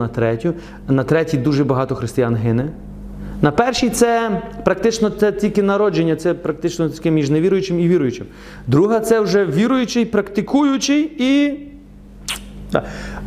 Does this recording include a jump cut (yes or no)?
no